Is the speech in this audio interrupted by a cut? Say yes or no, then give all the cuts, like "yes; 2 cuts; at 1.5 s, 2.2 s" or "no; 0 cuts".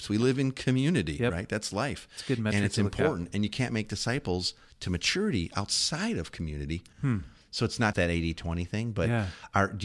yes; 2 cuts; at 6.9 s, 7.9 s